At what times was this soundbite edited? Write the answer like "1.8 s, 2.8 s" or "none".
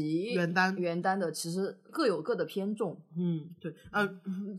1.9 s